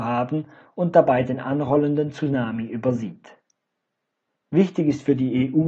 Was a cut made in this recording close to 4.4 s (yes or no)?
yes